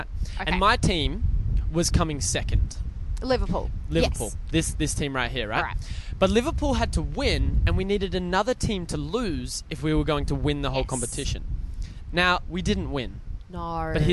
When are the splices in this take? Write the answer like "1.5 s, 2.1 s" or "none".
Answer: 12.4 s

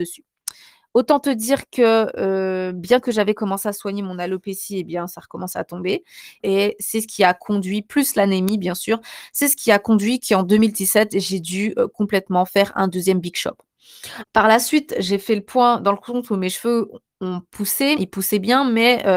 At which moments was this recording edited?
6.4 s, 14.2 s, 18.0 s

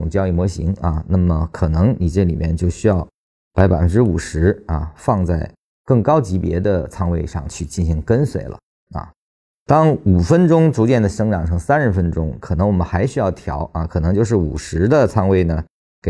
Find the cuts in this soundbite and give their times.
9.5 s

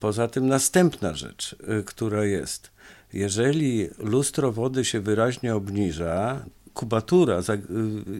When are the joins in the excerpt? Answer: 1.8 s, 6.5 s

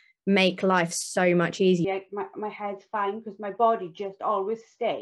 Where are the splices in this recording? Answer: 1.8 s

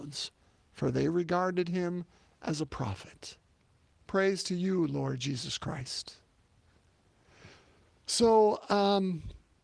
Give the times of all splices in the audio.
4.0 s

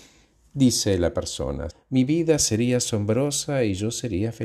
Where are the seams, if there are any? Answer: 1.7 s

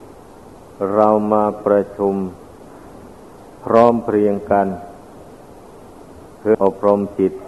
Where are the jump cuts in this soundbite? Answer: 6.5 s

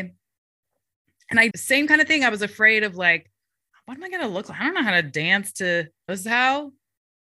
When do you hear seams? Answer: 1.5 s, 6.1 s

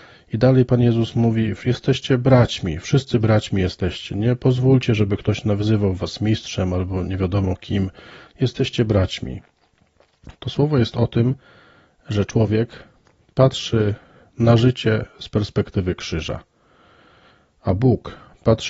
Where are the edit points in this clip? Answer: 10.3 s

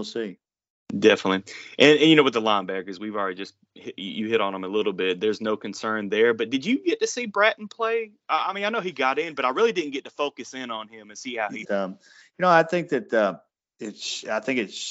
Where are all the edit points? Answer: 11.6 s

